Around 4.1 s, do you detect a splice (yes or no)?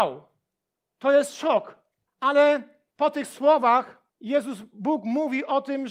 yes